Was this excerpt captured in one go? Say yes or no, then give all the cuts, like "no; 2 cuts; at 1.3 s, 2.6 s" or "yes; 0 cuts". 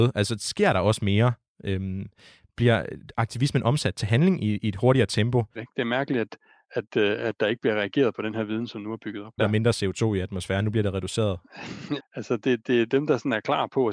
no; 3 cuts; at 5.5 s, 9.4 s, 12.0 s